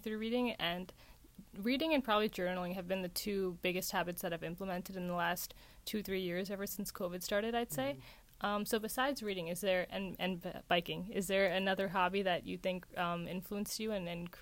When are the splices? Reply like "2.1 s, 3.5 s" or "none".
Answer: none